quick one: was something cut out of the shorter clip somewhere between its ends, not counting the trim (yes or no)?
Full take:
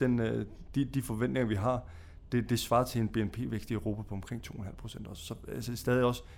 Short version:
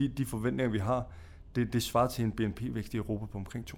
no